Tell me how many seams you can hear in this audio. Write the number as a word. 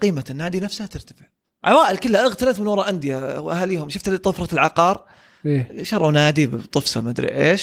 zero